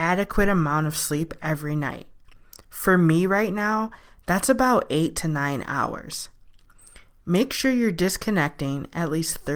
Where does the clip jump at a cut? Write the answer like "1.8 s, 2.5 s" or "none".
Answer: none